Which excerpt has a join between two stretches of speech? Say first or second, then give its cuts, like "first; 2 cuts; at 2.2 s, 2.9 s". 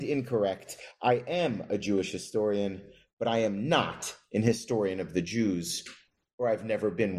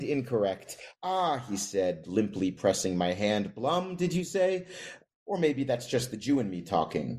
second; 2 cuts; at 0.9 s, 5.0 s